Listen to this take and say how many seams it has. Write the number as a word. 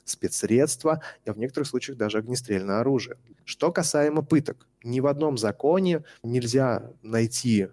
one